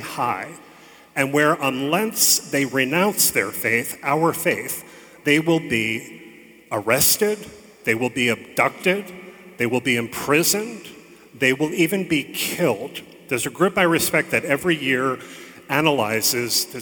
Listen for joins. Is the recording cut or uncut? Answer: uncut